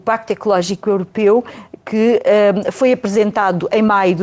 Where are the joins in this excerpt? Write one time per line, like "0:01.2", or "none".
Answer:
none